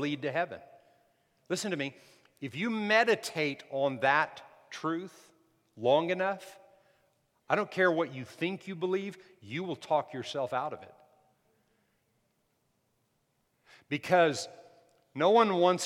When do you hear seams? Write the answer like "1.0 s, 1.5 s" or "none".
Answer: none

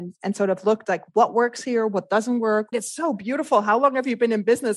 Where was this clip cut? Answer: 2.7 s

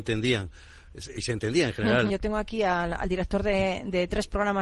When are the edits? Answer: 2.1 s

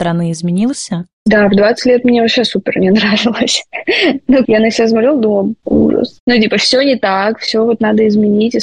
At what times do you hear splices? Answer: 4.4 s

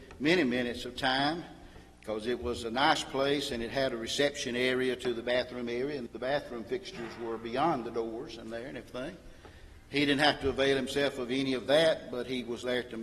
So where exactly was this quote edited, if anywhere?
6.1 s

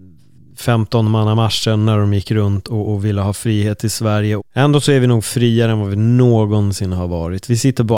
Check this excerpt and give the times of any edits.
2.8 s, 4.4 s

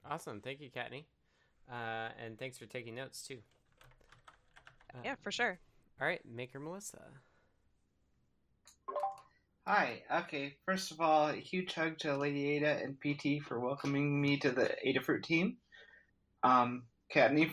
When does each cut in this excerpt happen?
none

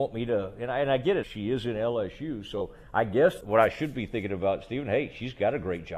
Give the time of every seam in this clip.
1.2 s, 3.4 s

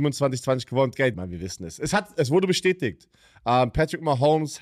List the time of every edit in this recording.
1.1 s

